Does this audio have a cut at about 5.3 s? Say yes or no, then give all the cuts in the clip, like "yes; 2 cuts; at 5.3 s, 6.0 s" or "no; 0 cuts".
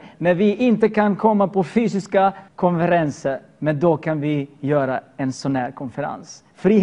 no; 1 cut; at 2.5 s